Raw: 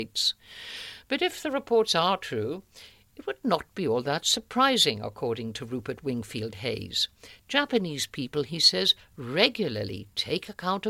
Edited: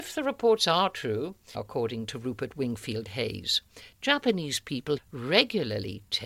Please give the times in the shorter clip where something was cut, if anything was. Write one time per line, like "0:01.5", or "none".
0:01.5
0:05.0